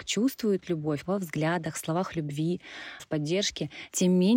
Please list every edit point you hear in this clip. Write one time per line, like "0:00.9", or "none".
0:01.1
0:03.0